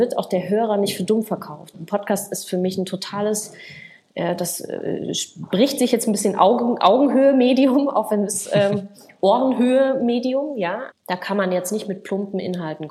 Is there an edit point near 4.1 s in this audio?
no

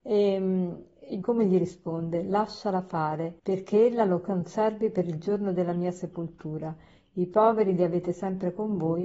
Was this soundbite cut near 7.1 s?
no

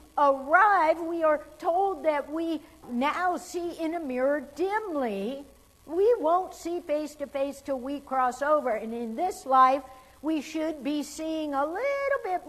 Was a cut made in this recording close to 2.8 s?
yes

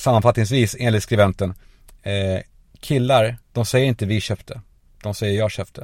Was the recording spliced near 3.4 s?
yes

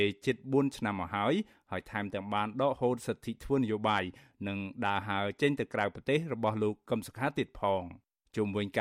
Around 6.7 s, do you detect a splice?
no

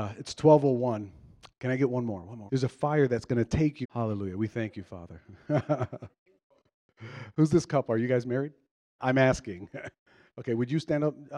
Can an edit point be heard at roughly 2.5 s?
yes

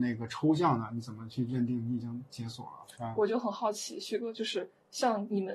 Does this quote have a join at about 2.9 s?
yes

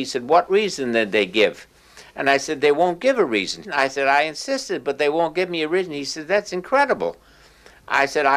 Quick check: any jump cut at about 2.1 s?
no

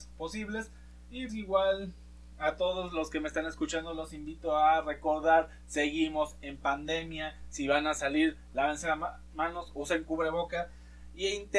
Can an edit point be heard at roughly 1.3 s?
yes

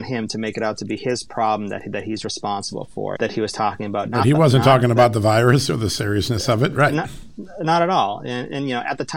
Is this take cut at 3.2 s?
yes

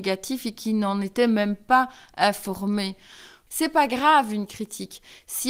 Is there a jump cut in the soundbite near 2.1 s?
no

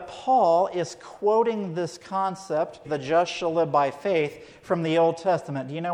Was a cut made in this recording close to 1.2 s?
no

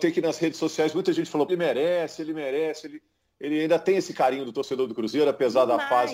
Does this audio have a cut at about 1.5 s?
yes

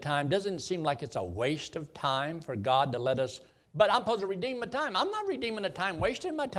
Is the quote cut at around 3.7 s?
yes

